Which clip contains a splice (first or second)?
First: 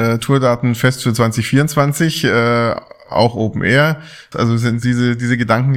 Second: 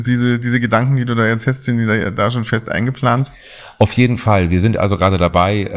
first